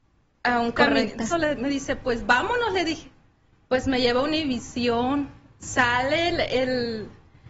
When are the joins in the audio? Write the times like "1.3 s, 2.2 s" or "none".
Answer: 1.3 s

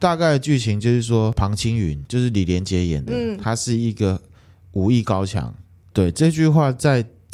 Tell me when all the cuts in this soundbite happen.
5.9 s

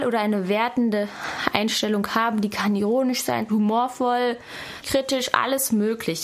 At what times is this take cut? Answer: 3.5 s, 4.8 s

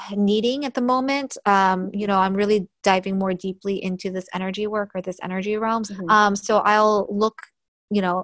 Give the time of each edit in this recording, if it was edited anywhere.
5.9 s

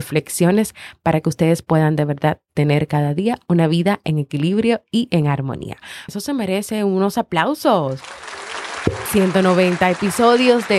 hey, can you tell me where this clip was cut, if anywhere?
6.1 s, 9.1 s

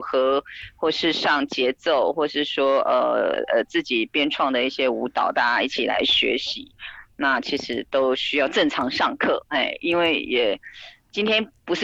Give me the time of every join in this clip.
none

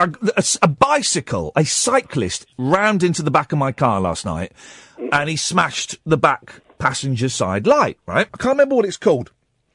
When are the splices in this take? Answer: 8.3 s

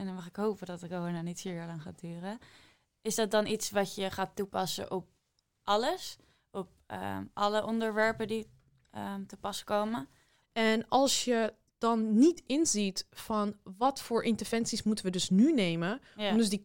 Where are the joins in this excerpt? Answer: 10.4 s

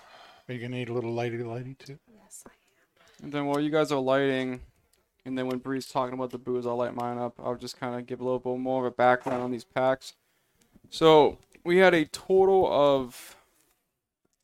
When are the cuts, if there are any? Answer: none

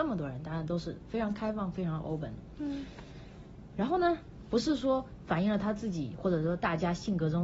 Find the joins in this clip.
4.5 s

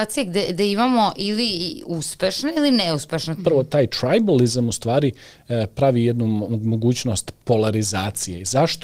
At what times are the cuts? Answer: 3.4 s

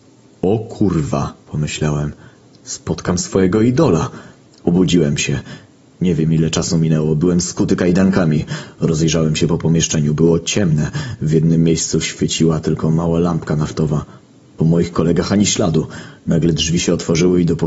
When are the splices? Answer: 1.4 s, 4.5 s

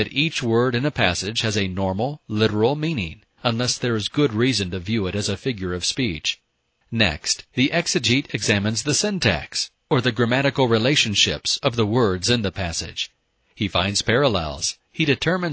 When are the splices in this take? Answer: 6.8 s

